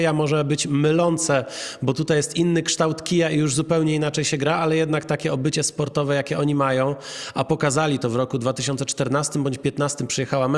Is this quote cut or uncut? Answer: uncut